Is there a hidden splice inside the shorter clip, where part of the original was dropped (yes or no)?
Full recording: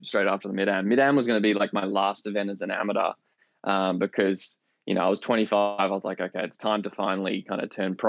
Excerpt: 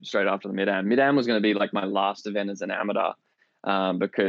no